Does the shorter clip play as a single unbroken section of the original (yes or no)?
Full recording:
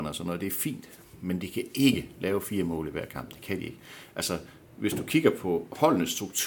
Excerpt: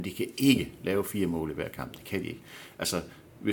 yes